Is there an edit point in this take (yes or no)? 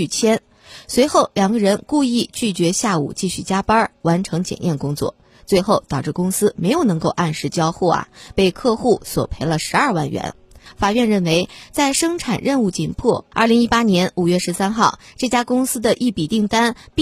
yes